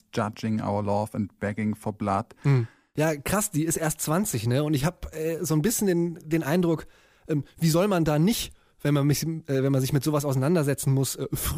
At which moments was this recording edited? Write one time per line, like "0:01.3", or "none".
none